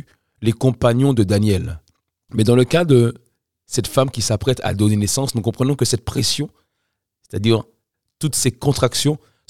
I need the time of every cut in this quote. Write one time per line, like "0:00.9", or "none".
0:02.3

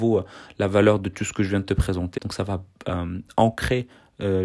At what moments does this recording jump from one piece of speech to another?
0:02.2

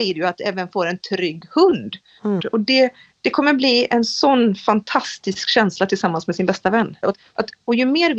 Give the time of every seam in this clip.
0:02.4
0:07.0

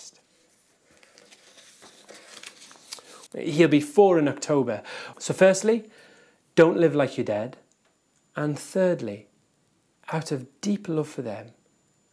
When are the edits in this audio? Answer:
0:03.3
0:05.1
0:08.2

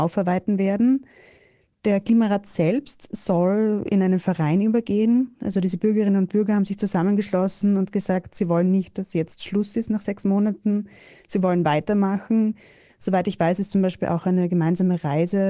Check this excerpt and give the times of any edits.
none

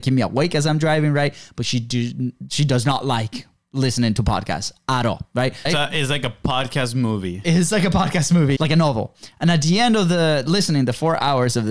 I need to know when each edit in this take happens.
0:05.7
0:08.6

